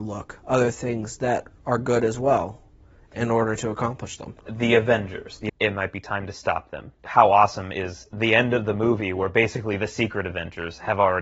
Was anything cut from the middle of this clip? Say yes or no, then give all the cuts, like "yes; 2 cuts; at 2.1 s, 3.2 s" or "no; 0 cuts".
yes; 1 cut; at 5.5 s